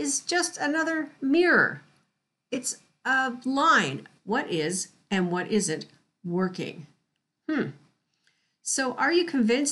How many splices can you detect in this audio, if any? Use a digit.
1